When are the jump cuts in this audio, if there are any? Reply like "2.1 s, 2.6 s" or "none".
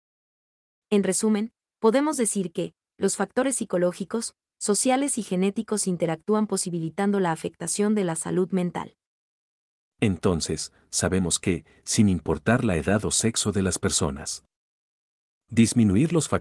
none